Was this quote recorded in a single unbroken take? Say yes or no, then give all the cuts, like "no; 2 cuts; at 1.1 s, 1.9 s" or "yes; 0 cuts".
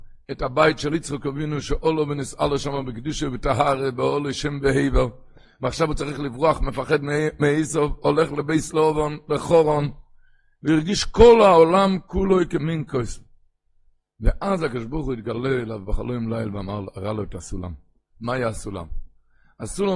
yes; 0 cuts